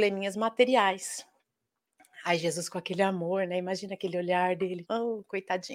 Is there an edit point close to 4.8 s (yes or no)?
yes